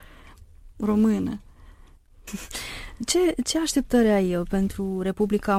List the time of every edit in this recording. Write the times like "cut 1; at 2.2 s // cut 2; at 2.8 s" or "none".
cut 1; at 2.3 s